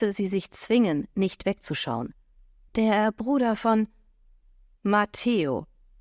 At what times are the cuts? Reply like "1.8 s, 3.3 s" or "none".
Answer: 2.7 s